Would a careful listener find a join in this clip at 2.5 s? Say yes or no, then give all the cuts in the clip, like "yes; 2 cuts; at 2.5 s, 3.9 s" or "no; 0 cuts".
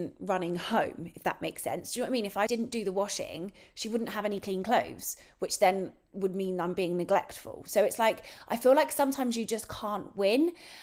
yes; 1 cut; at 2.5 s